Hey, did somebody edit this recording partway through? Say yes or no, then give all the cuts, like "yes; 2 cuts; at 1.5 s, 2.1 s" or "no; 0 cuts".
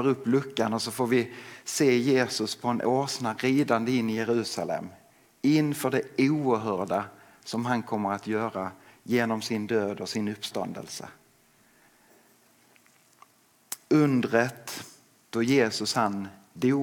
no; 0 cuts